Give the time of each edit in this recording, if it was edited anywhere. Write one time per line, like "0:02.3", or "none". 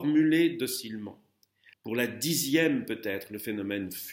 0:01.7